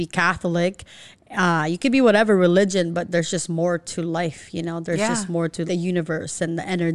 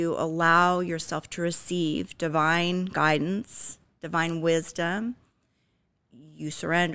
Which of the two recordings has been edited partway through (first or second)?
first